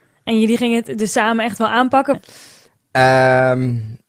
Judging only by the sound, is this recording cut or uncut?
cut